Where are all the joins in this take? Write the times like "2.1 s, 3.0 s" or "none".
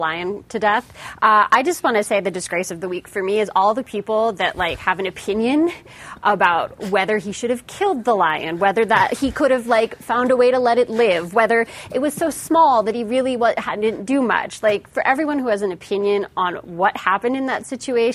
none